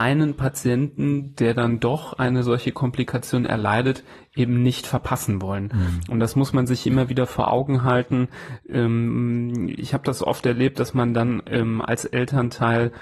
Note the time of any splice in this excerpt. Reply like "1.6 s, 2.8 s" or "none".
none